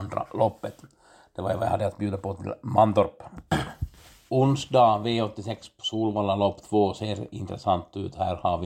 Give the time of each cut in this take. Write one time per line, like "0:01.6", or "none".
none